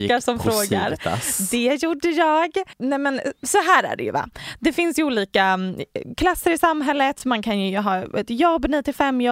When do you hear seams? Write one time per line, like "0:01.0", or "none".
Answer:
none